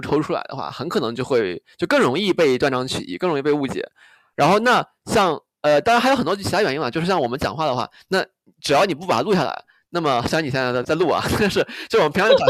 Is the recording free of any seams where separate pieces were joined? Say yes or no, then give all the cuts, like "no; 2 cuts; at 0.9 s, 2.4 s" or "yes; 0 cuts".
no; 2 cuts; at 5.8 s, 10.8 s